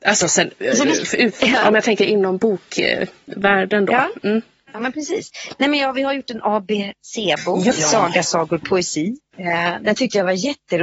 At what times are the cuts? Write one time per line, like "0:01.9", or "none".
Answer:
0:07.7
0:09.3